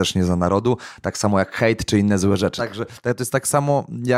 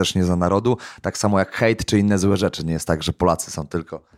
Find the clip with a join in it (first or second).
first